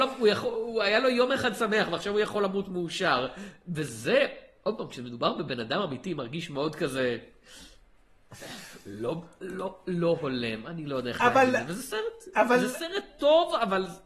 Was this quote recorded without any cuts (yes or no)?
yes